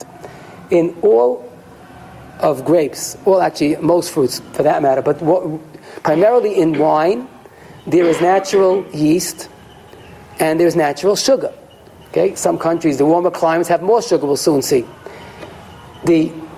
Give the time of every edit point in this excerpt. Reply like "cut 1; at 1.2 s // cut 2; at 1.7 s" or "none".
none